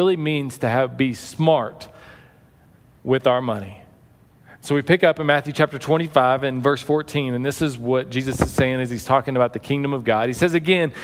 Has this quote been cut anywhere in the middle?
no; 0 cuts

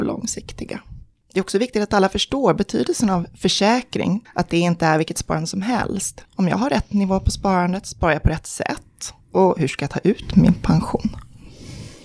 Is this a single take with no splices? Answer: no; 2 cuts; at 4.2 s, 6.2 s

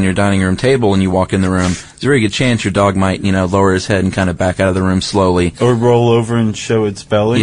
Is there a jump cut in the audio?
no; 0 cuts

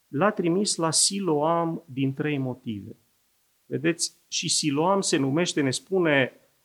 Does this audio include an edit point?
no; 0 cuts

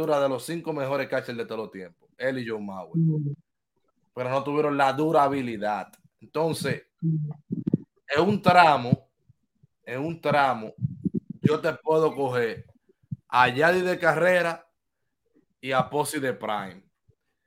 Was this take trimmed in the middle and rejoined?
no; 0 cuts

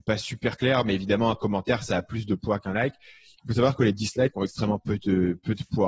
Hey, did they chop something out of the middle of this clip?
no; 0 cuts

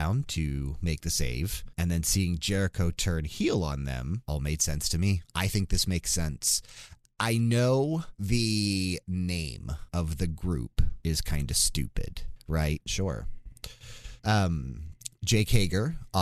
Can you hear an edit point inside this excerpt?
yes; 1 cut; at 12.9 s

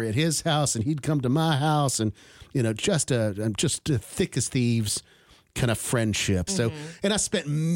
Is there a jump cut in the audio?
yes; 1 cut; at 6.5 s

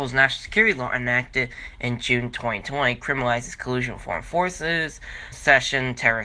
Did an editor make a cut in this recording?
yes; 1 cut; at 5.3 s

